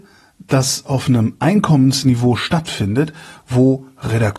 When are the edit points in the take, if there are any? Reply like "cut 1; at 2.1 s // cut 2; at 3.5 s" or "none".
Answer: none

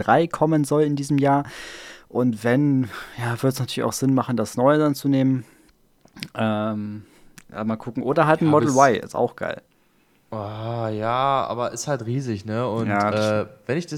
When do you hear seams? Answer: none

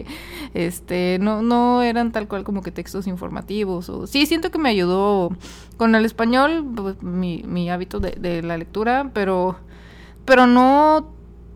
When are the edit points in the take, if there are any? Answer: none

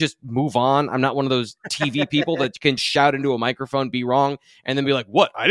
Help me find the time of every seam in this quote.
cut 1; at 2.8 s

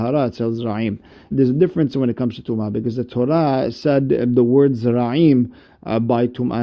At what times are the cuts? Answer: cut 1; at 1.3 s

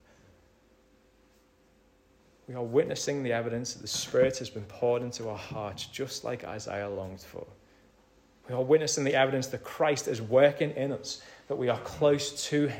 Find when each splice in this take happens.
none

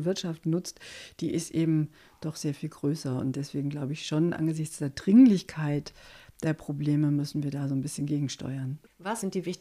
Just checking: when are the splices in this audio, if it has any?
none

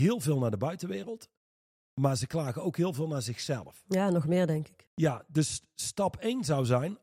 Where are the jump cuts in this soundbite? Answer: none

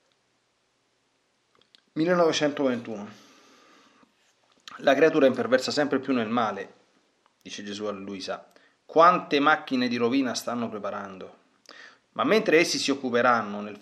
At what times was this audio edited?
cut 1; at 12.0 s

